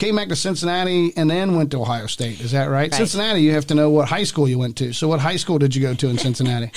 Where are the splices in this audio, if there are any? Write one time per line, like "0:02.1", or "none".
0:02.9